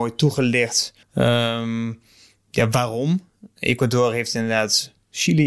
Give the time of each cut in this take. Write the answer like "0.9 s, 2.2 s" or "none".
1.0 s